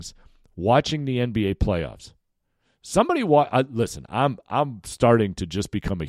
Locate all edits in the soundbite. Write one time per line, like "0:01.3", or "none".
none